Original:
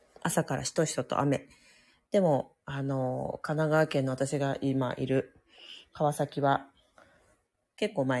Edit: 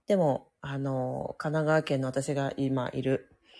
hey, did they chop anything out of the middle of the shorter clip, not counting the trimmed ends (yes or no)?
no